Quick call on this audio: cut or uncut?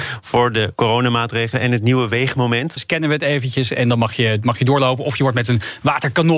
cut